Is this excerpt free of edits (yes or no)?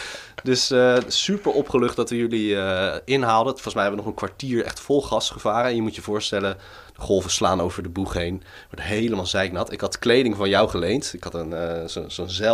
yes